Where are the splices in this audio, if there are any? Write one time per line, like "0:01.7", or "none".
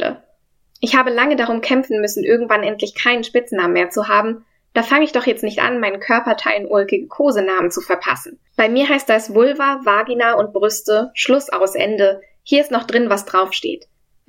none